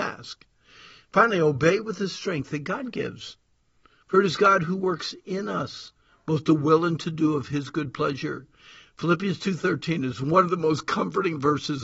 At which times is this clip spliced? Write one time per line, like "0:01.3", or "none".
none